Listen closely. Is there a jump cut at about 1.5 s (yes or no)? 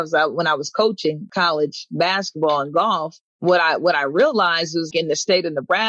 no